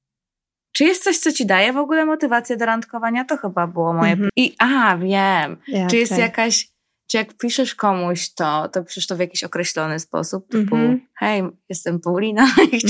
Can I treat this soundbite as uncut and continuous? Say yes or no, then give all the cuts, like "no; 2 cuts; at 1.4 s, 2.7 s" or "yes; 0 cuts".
no; 1 cut; at 4.3 s